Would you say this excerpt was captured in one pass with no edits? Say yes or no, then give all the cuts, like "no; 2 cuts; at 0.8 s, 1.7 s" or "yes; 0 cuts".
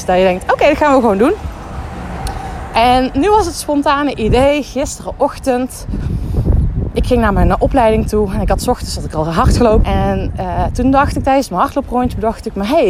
no; 1 cut; at 9.8 s